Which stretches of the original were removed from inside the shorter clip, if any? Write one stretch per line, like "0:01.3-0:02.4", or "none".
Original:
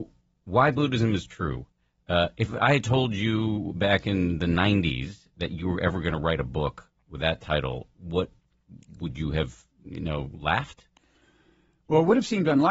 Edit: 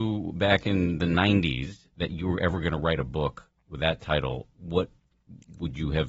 none